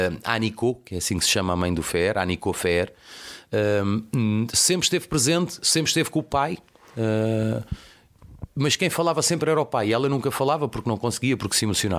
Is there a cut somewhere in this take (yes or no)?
no